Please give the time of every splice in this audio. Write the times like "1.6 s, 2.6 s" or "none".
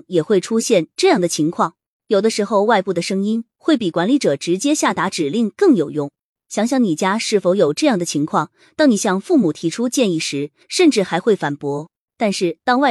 6.4 s, 10.6 s